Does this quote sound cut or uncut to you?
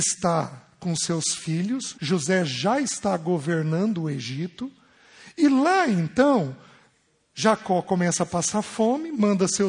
cut